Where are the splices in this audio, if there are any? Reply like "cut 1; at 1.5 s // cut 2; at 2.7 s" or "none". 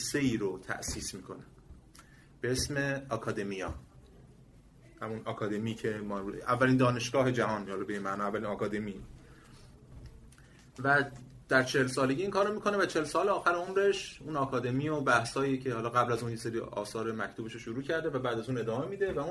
none